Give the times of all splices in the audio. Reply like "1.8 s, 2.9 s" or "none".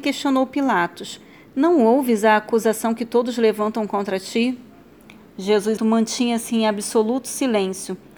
5.8 s

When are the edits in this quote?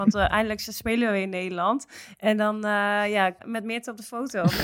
3.4 s

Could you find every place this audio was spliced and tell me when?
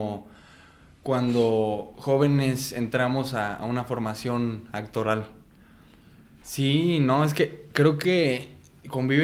6.4 s

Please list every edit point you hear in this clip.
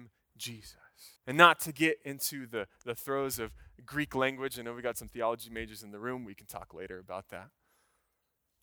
1.2 s

